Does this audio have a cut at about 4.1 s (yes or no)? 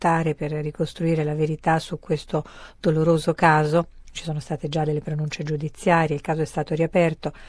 no